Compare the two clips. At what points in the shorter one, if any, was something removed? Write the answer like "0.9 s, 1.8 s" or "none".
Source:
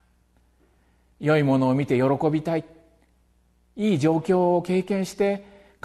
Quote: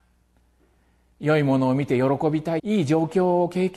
2.6 s